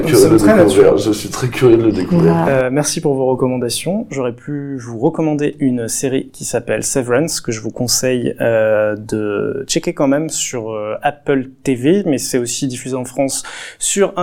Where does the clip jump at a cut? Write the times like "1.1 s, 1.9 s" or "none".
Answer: 4.1 s